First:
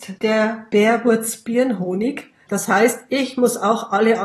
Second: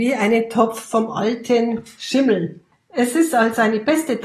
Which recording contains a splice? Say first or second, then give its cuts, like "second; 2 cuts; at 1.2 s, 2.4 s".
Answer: first; 1 cut; at 2.5 s